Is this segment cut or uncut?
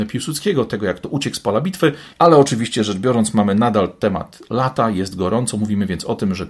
cut